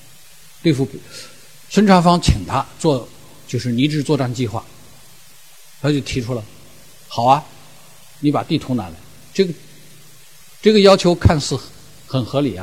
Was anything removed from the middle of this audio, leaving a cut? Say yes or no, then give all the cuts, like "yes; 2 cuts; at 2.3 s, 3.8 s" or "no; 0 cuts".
no; 0 cuts